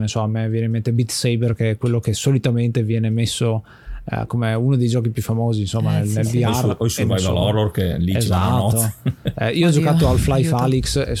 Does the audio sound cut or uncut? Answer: uncut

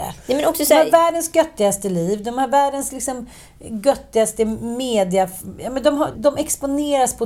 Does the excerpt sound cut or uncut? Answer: cut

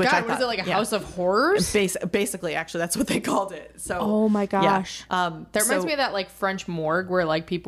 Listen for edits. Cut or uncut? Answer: uncut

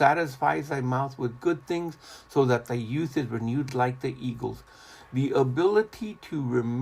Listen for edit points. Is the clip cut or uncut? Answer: uncut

